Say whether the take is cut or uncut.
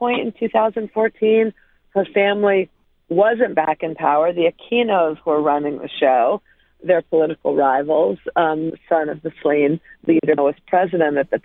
cut